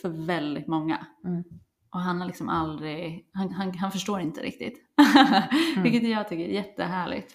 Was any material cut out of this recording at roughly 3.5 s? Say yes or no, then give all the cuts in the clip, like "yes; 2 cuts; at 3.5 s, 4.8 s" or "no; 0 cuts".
yes; 1 cut; at 3.5 s